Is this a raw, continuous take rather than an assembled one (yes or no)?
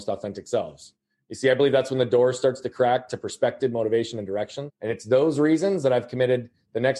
no